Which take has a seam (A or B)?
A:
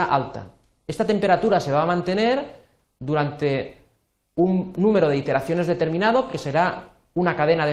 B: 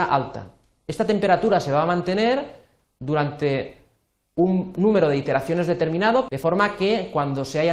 B